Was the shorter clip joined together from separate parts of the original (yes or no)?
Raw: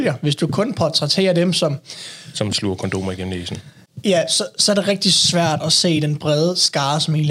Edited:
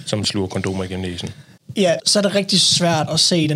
yes